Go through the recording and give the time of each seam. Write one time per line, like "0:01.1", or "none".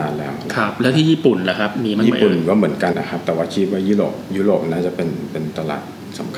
0:02.9